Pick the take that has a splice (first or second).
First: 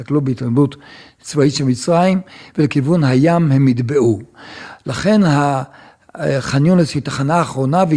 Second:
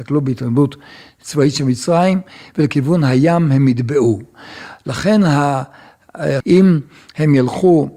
second